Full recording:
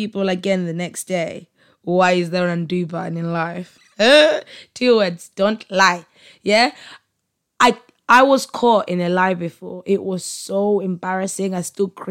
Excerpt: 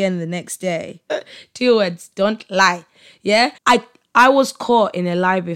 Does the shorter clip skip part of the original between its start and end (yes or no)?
yes